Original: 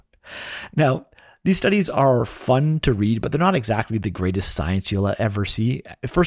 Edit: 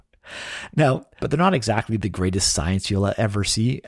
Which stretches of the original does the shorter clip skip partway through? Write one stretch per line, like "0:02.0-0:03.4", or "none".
0:01.2-0:03.2